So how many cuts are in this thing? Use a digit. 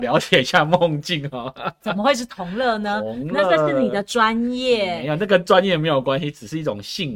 0